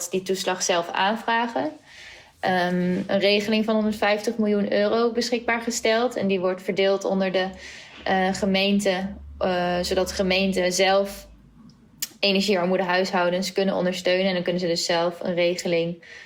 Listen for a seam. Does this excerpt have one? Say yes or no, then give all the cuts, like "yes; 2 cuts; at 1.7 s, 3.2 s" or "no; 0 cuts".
yes; 1 cut; at 3.1 s